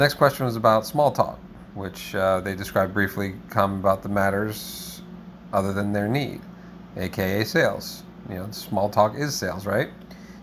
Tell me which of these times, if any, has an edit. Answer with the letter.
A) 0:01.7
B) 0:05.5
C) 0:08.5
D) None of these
A